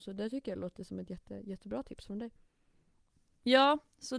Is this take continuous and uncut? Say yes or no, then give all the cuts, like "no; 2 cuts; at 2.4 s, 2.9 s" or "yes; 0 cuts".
yes; 0 cuts